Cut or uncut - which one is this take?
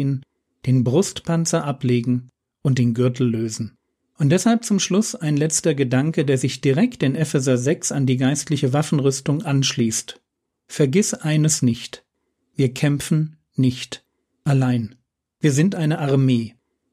uncut